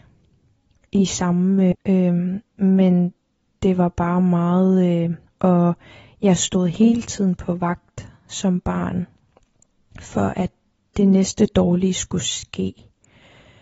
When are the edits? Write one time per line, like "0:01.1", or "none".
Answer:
0:01.7
0:05.3

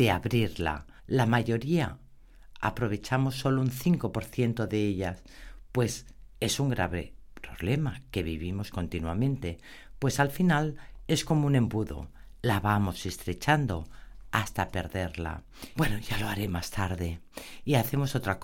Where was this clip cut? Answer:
0:01.0
0:15.7

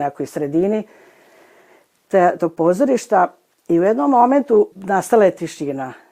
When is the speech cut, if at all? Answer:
0:02.4
0:04.7

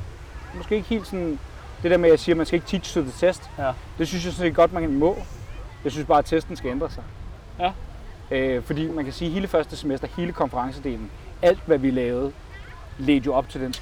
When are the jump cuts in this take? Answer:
none

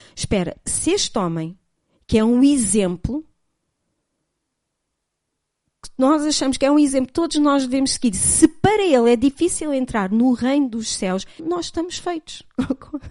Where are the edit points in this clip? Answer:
0:11.4

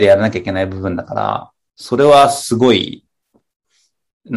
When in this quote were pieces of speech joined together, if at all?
none

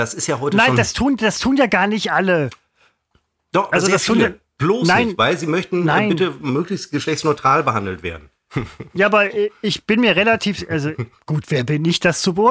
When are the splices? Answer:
none

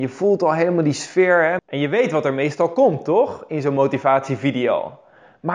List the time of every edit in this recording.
0:01.6

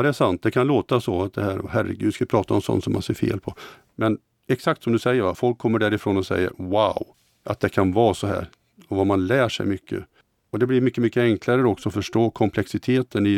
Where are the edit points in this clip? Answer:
none

